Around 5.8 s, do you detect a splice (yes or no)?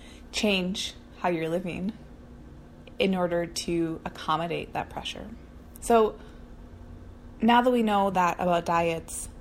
yes